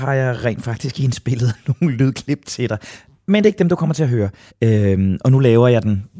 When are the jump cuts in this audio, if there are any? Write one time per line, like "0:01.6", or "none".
0:04.5